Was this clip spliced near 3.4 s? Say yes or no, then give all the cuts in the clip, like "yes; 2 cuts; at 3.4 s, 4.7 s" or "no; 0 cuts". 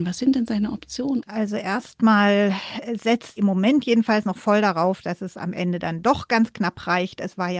yes; 1 cut; at 3.4 s